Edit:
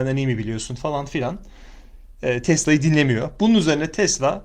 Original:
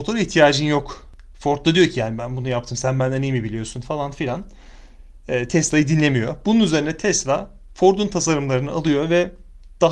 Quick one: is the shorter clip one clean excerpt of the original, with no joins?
yes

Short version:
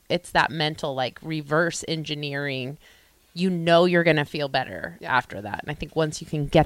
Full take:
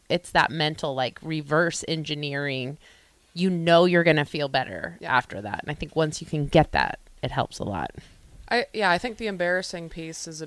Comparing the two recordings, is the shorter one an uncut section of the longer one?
yes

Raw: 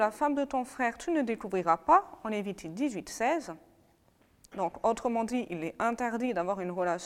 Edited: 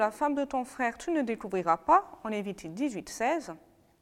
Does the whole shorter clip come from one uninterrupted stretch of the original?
yes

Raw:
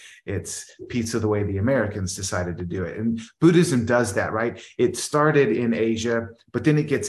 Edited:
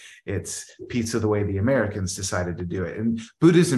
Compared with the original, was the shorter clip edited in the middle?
no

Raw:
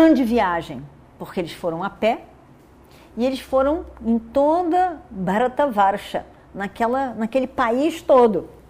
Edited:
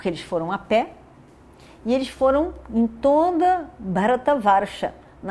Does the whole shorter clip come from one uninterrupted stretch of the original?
yes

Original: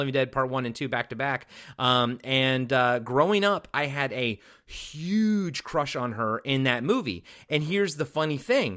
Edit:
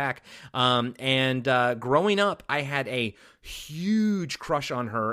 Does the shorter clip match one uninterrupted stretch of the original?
yes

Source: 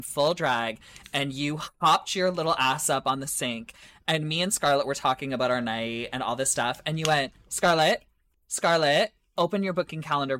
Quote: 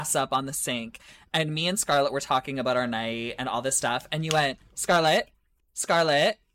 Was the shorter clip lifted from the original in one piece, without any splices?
yes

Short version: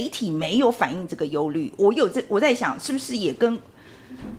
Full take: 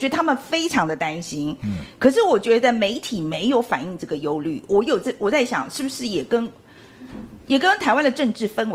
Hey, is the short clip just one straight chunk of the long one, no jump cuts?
yes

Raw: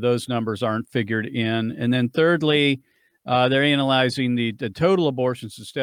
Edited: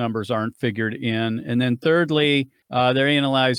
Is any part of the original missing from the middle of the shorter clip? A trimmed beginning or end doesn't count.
yes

